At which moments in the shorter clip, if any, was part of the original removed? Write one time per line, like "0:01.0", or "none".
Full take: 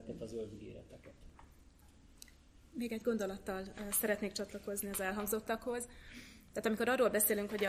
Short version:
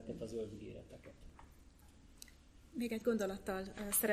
none